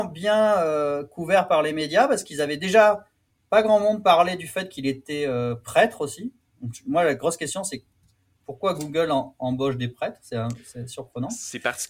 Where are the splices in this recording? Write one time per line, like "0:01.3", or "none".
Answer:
none